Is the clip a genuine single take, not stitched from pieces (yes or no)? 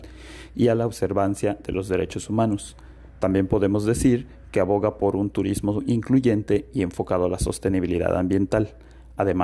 yes